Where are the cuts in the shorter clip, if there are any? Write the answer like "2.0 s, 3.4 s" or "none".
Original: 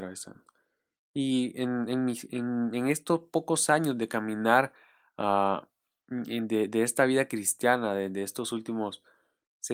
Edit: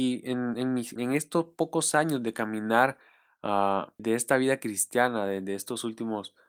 1.0 s, 4.0 s